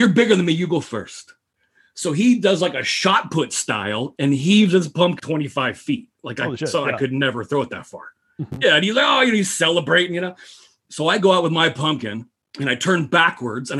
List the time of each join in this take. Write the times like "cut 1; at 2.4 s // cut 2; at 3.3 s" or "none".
cut 1; at 5.2 s

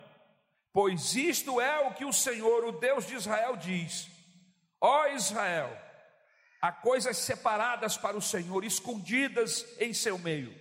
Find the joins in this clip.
none

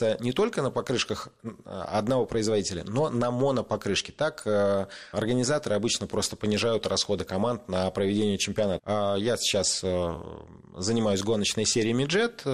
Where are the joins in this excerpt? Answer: cut 1; at 5.1 s // cut 2; at 8.8 s

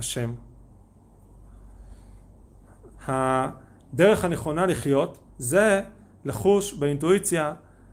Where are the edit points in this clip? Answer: cut 1; at 2.9 s // cut 2; at 5.3 s

